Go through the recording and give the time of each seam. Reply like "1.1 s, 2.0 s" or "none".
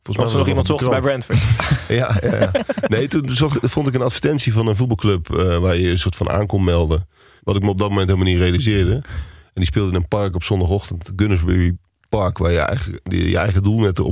7.4 s